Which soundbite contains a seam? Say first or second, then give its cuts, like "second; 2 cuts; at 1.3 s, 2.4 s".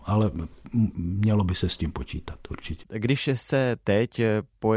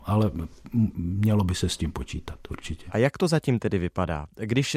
first; 1 cut; at 2.8 s